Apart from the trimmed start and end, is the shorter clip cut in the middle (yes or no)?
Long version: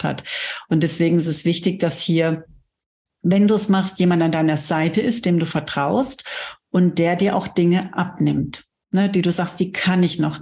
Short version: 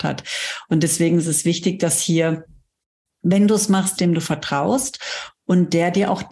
yes